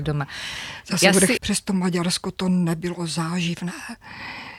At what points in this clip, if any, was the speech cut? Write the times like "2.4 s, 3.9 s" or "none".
1.4 s